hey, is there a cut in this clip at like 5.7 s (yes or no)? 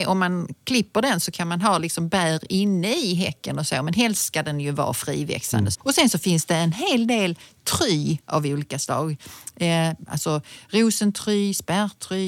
yes